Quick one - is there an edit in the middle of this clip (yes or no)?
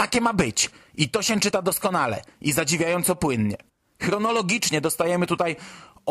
no